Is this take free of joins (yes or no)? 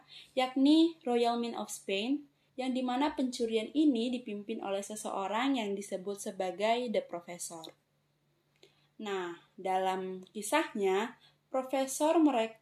no